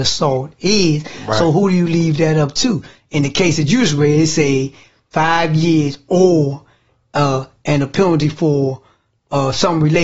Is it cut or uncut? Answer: uncut